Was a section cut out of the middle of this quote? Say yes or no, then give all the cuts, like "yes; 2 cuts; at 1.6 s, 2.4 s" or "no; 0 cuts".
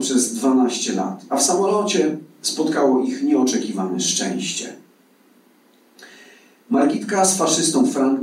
no; 0 cuts